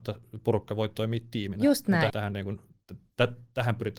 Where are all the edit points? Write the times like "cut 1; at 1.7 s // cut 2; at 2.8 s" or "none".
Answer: cut 1; at 2.1 s